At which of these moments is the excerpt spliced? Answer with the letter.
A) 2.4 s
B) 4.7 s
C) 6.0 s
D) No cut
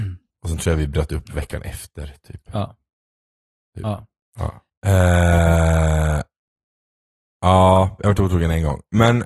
B